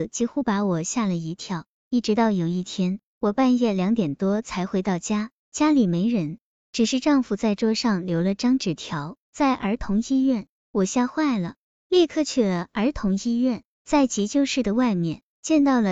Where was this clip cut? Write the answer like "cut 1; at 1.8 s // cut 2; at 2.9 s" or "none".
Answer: cut 1; at 1.8 s // cut 2; at 9.2 s